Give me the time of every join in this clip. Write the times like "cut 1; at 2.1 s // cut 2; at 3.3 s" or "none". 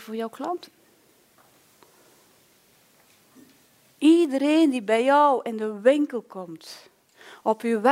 none

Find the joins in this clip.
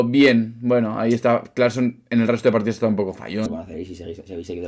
cut 1; at 3.5 s

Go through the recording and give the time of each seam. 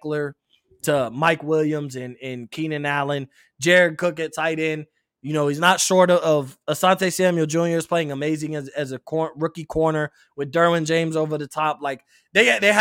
none

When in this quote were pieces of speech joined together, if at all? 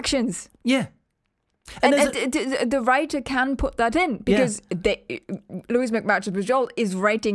none

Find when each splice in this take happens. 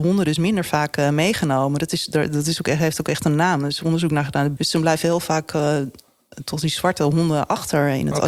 cut 1; at 4.6 s

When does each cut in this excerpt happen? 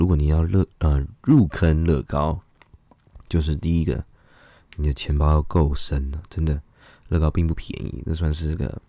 none

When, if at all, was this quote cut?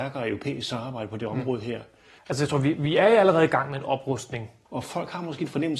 cut 1; at 2.2 s // cut 2; at 4.7 s

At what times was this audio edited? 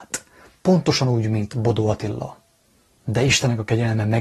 cut 1; at 3.0 s

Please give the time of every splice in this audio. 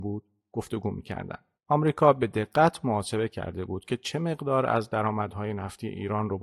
cut 1; at 1.5 s

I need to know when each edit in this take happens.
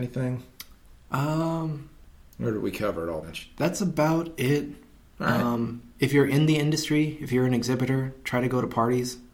cut 1; at 3.2 s

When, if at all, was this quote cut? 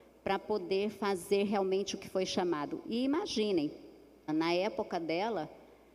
cut 1; at 4.3 s

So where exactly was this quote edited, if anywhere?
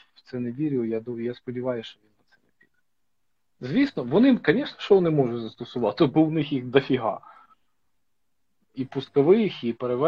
none

